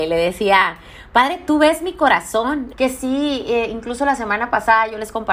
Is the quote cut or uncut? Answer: cut